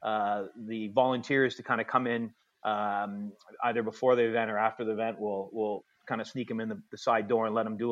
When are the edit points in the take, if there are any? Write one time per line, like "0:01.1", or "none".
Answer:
none